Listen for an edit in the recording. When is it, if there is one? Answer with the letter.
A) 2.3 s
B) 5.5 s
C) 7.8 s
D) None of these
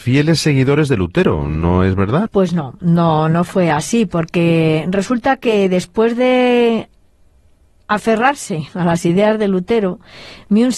A